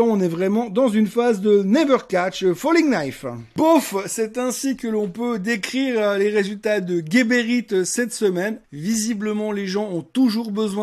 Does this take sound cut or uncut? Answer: cut